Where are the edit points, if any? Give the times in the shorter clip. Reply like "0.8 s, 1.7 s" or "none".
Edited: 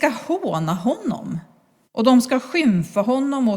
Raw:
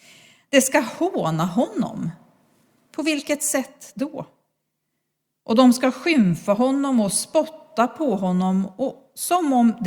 1.8 s